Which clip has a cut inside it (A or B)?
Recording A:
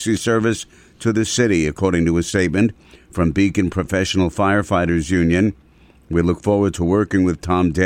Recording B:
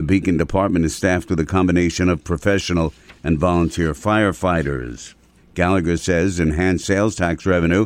B